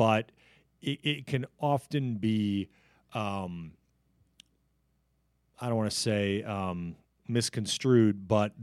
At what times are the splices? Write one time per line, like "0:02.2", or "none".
none